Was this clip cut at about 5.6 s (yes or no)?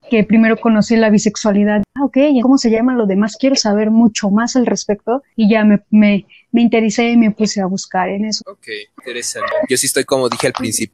no